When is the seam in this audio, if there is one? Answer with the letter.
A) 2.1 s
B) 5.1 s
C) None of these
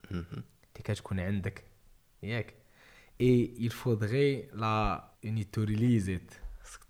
B